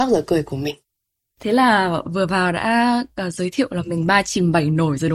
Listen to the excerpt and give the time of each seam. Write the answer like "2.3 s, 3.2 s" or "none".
none